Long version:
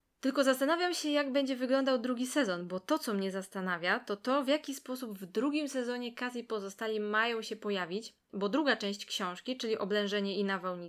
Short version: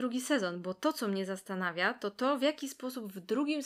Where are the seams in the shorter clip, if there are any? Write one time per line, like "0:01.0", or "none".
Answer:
none